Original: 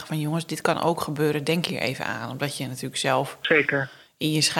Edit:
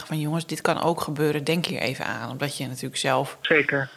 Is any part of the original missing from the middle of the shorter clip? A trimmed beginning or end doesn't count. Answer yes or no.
no